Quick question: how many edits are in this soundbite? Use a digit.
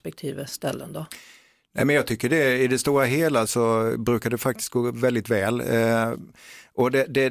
1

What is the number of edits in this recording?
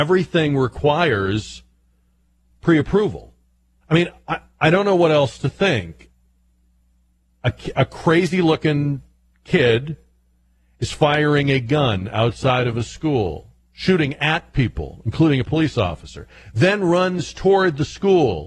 1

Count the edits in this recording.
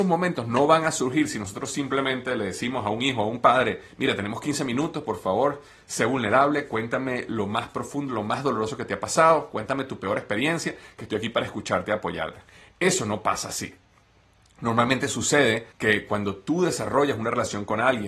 1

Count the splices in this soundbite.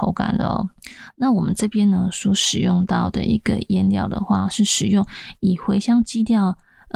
0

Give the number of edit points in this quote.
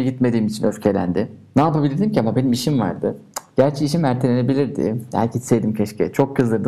0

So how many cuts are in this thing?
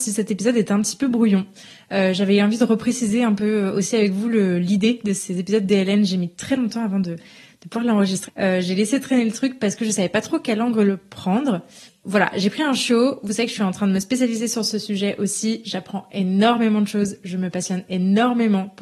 1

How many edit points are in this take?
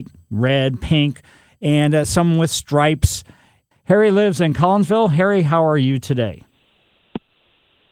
1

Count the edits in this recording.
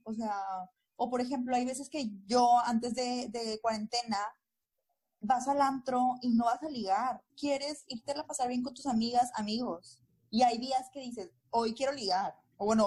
1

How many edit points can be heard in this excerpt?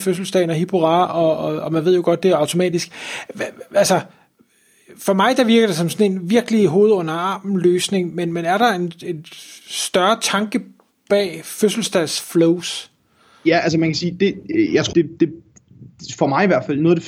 1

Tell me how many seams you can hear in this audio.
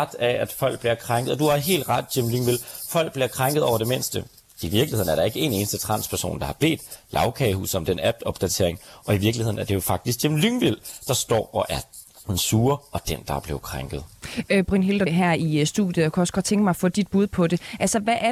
1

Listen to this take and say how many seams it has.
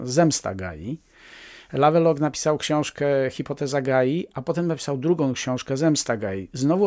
0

